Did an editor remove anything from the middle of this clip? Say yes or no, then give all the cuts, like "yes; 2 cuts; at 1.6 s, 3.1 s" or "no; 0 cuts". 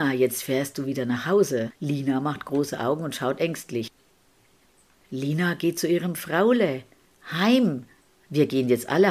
yes; 1 cut; at 1.7 s